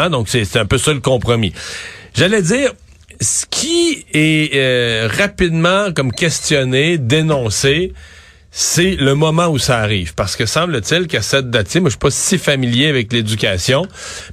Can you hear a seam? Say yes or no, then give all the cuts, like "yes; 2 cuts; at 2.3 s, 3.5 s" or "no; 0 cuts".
no; 0 cuts